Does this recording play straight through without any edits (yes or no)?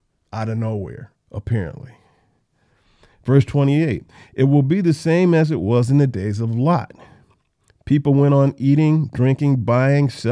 no